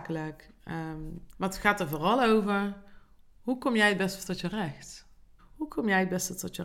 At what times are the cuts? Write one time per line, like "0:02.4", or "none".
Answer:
0:01.3
0:05.4